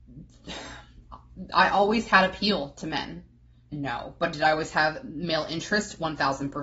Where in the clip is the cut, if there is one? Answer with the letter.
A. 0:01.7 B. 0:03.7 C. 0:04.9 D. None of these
B